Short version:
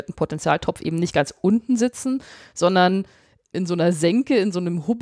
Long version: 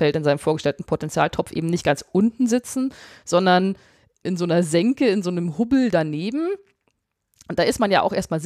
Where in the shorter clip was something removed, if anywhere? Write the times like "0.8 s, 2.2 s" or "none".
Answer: none